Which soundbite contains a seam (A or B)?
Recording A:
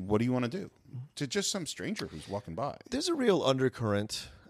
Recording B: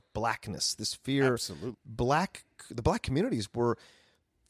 B